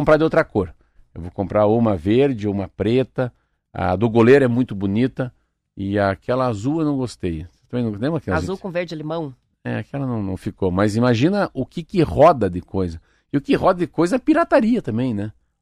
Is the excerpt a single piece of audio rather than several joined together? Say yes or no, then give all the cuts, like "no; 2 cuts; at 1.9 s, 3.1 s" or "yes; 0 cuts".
yes; 0 cuts